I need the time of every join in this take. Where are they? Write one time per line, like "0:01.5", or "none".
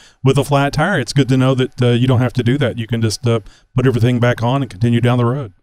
none